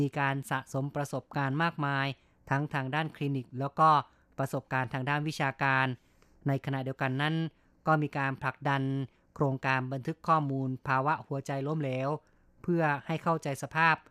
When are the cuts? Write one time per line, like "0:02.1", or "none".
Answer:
none